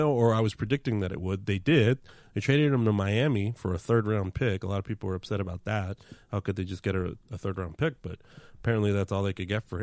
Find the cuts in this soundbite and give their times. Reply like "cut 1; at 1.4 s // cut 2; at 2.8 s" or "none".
none